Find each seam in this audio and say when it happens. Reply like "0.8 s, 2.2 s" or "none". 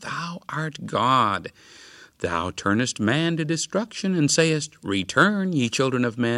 none

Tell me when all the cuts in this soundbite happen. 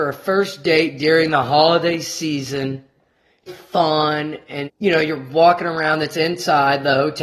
3.5 s, 4.6 s

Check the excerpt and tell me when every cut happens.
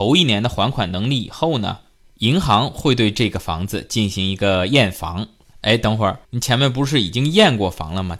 6.2 s

